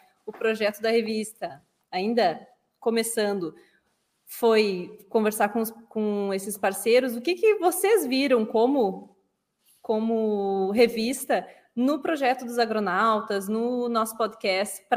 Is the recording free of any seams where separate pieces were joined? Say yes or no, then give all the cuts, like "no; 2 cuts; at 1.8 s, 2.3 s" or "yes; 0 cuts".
yes; 0 cuts